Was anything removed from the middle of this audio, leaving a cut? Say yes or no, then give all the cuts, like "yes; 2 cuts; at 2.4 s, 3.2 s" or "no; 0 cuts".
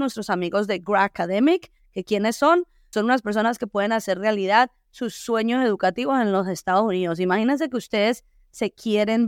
yes; 1 cut; at 2.9 s